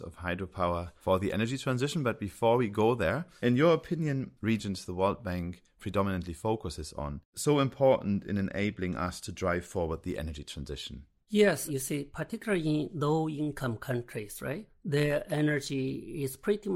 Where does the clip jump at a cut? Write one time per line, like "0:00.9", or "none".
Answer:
0:04.4